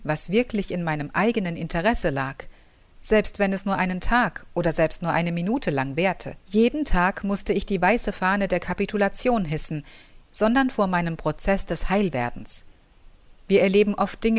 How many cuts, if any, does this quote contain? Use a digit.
3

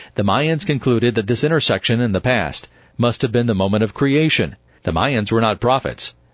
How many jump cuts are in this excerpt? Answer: 1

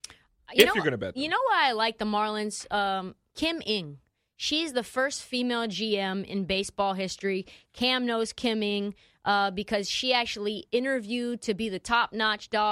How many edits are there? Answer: 0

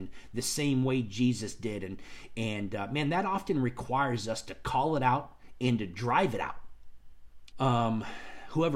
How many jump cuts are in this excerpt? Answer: 1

